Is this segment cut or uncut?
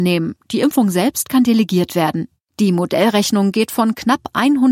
uncut